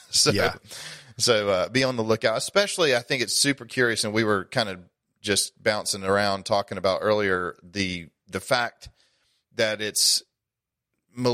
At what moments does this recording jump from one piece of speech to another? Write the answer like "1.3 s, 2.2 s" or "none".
none